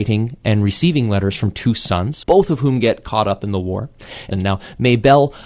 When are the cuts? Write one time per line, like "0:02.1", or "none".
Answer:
0:02.2
0:04.3